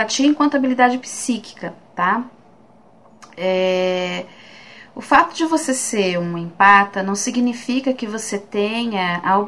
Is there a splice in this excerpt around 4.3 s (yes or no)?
no